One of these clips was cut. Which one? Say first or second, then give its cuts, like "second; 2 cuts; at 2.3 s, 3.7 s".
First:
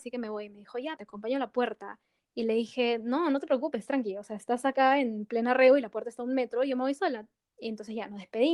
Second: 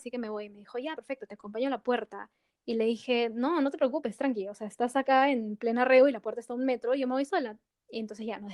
first; 1 cut; at 1.0 s